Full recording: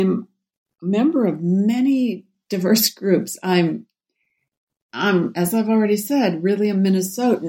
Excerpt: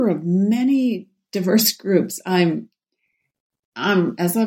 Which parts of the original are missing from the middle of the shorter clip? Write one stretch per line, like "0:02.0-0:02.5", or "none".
none